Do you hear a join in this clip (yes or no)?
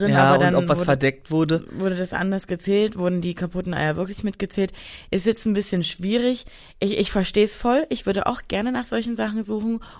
no